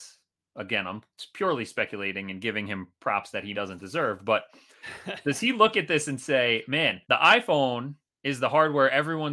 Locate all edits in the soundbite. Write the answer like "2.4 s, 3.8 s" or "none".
3.5 s, 7.0 s

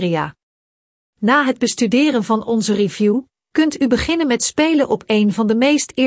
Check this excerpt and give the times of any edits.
none

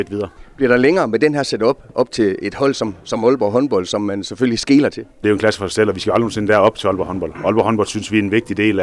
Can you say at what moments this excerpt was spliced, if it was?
5.2 s

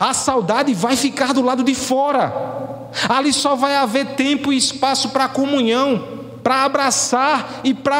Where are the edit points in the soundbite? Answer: none

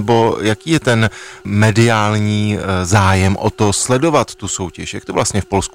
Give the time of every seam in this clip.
none

